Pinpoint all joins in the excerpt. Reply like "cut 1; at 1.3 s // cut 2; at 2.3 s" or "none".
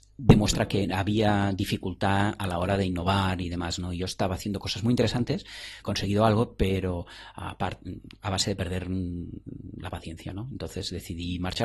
cut 1; at 5.8 s